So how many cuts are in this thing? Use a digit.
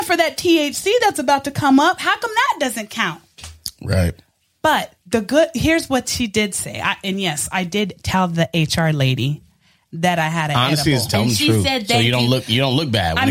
1